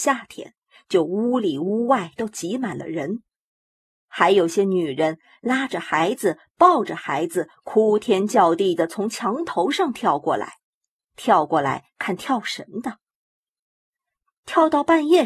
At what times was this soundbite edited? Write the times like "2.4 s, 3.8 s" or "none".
none